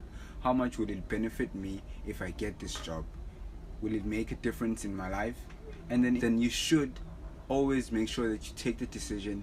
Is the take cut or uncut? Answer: cut